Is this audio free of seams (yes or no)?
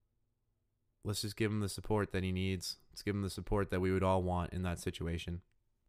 yes